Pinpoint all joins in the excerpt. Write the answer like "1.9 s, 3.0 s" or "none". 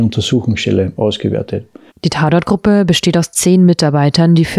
1.9 s

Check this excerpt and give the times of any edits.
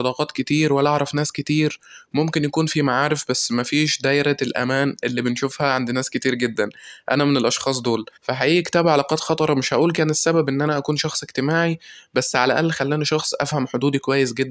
8.2 s

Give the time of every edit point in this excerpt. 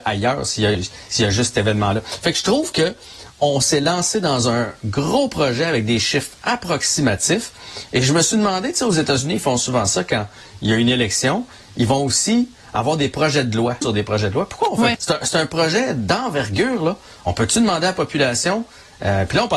13.8 s, 14.9 s

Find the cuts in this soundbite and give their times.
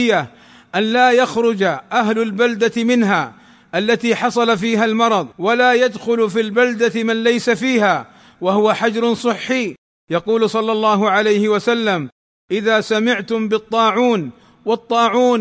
5.3 s

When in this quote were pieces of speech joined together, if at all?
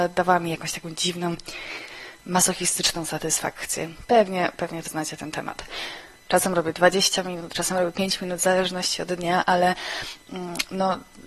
4.9 s, 6.3 s

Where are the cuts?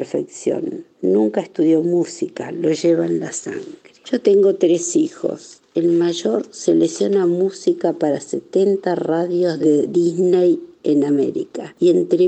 none

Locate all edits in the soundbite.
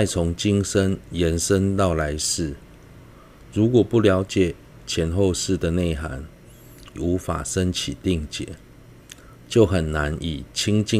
7.0 s

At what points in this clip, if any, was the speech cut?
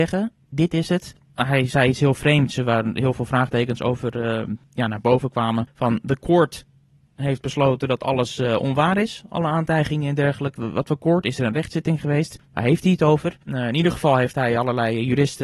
10.6 s

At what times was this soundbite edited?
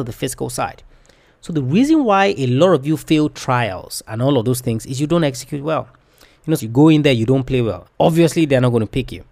6.6 s, 7.8 s

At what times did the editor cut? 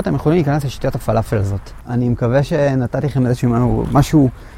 1.8 s

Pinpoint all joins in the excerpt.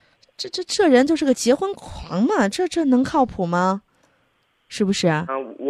none

